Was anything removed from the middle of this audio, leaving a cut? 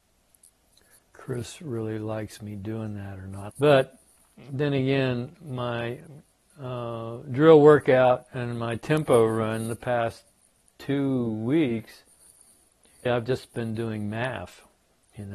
yes; 2 cuts; at 3.5 s, 13.1 s

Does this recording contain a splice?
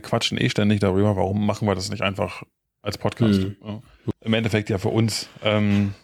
yes; 1 cut; at 4.1 s

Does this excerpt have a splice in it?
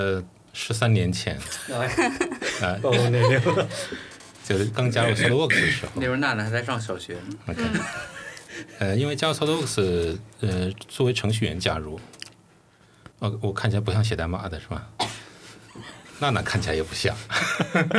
yes; 1 cut; at 13.1 s

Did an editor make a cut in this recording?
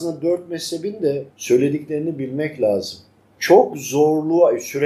yes; 1 cut; at 1.3 s

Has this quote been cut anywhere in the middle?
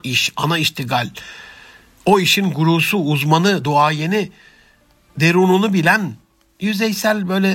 no; 0 cuts

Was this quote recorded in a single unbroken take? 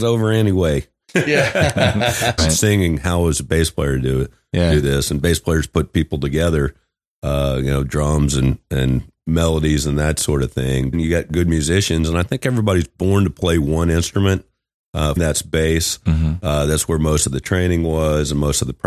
no; 3 cuts; at 2.4 s, 10.9 s, 15.2 s

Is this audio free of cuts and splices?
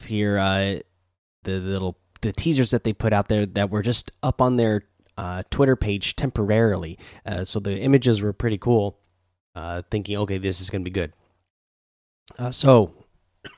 no; 1 cut; at 1.4 s

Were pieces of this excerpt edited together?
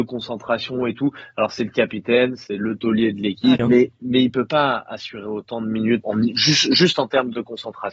yes; 2 cuts; at 3.6 s, 6.0 s

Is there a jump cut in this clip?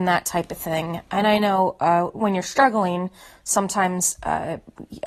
no; 0 cuts

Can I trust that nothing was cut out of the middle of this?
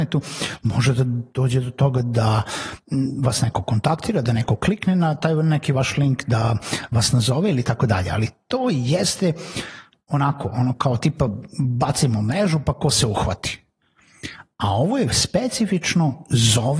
yes; 0 cuts

